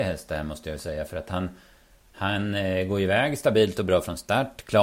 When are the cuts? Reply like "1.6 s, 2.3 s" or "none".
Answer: none